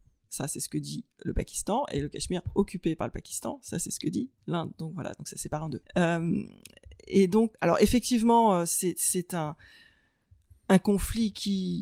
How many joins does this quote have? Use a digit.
2